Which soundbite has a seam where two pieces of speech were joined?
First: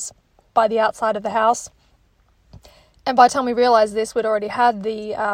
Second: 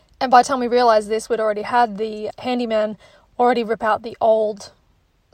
second; 1 cut; at 2.3 s

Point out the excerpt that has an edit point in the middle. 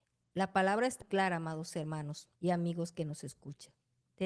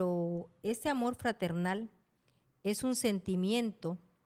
first; 2 cuts; at 1.0 s, 2.4 s

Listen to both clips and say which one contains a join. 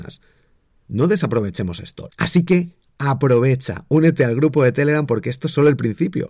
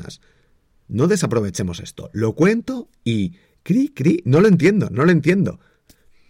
first; 1 cut; at 2.1 s

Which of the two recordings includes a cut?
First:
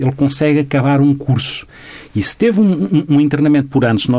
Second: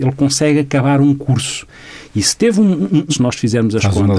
second; 1 cut; at 3.1 s

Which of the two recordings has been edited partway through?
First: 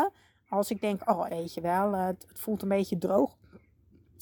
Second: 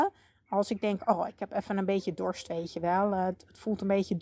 first; 1 cut; at 1.3 s

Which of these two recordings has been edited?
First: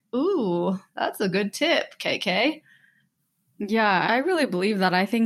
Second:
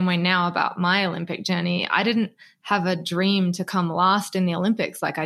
first; 1 cut; at 4.1 s

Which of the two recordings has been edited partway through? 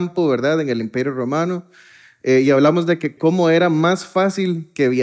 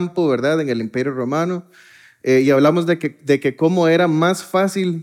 first; 1 cut; at 3.2 s

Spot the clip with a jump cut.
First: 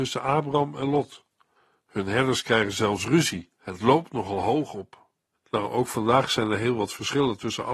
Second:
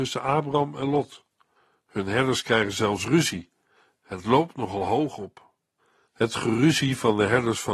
first; 2 cuts; at 3.5 s, 5.3 s

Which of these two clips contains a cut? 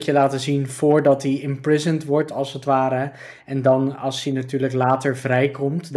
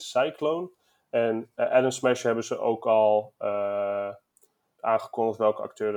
second; 1 cut; at 4.8 s

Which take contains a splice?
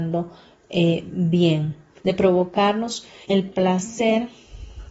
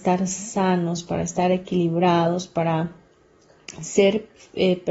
first; 2 cuts; at 2.0 s, 3.2 s

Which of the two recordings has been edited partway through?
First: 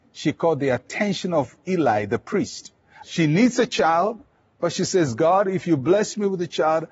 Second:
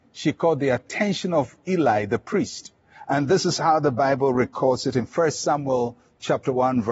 first; 1 cut; at 3.0 s

